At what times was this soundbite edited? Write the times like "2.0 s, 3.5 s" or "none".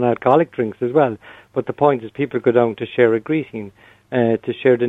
none